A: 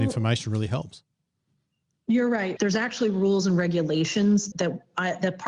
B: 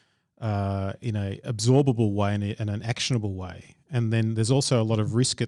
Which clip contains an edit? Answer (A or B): A